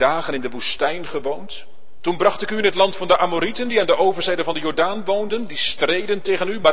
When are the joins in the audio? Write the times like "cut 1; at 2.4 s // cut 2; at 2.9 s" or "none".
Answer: none